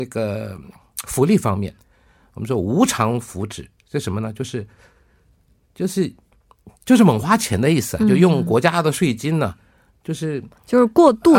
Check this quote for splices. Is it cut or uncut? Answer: uncut